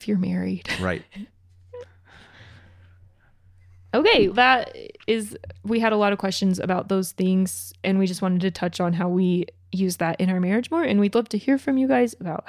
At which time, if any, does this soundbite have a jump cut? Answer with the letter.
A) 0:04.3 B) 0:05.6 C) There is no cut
A